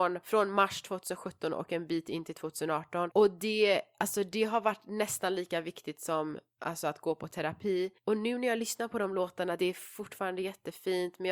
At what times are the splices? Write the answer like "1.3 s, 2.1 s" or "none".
9.6 s